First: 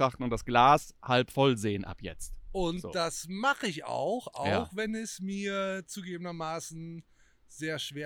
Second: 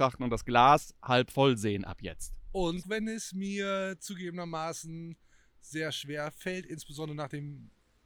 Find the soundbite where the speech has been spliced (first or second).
second